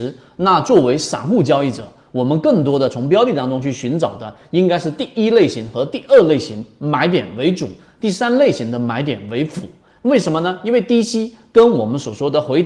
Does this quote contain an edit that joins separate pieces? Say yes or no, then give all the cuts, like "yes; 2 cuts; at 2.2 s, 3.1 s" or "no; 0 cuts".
no; 0 cuts